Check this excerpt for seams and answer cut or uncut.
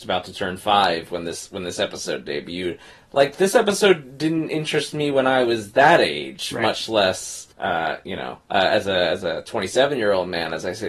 cut